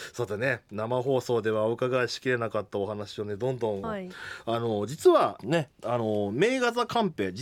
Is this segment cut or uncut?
cut